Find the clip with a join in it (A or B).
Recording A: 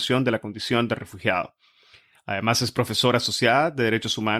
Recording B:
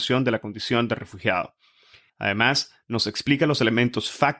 B